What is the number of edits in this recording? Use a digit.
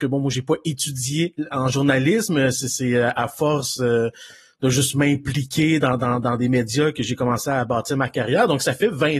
0